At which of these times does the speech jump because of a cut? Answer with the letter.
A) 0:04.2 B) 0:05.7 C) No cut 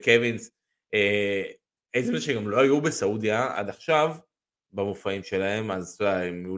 C